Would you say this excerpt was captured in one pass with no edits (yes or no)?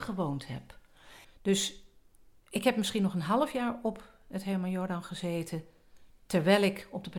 no